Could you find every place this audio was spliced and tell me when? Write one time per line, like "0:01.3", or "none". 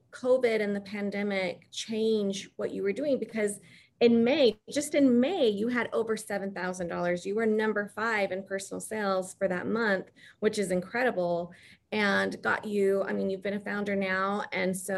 none